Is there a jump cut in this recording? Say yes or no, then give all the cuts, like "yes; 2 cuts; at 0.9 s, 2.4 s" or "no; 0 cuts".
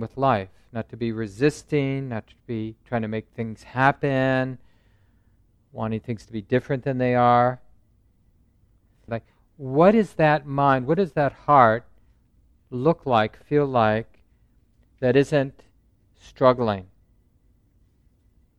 yes; 1 cut; at 9.1 s